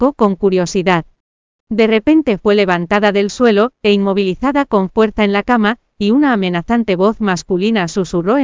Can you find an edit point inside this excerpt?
no; 0 cuts

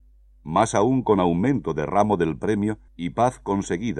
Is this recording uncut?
no; 1 cut; at 2.9 s

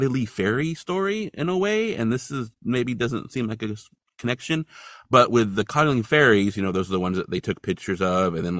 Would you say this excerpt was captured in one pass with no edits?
yes; 0 cuts

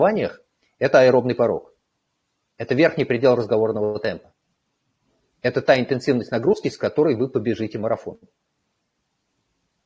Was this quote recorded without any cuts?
yes; 0 cuts

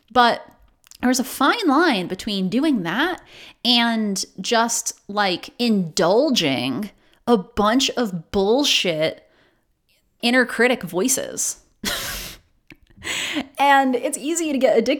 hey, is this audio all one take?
no; 1 cut; at 10.2 s

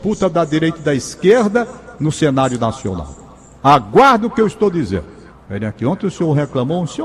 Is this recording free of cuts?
no; 1 cut; at 5.3 s

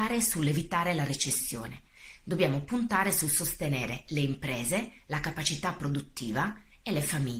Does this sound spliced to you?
no; 0 cuts

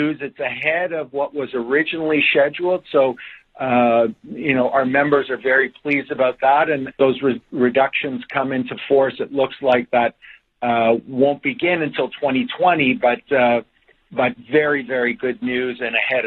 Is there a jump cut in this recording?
yes; 1 cut; at 6.9 s

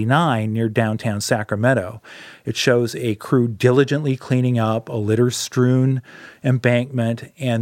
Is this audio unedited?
yes; 0 cuts

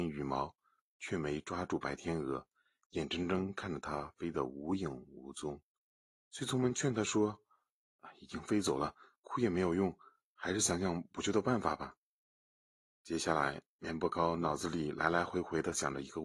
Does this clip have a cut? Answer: yes; 1 cut; at 6.1 s

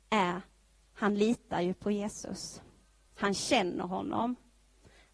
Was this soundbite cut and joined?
no; 0 cuts

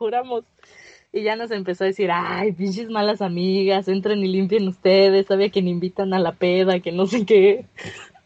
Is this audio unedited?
yes; 0 cuts

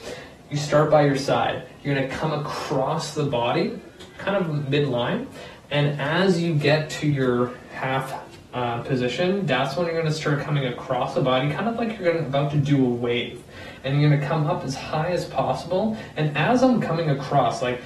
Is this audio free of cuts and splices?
yes; 0 cuts

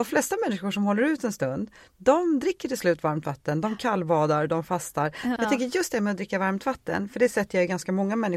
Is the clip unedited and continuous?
no; 1 cut; at 5.4 s

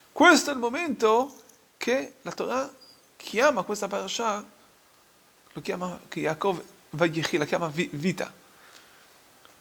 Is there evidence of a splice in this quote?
no; 0 cuts

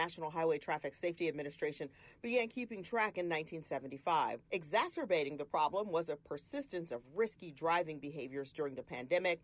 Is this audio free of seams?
no; 1 cut; at 4.4 s

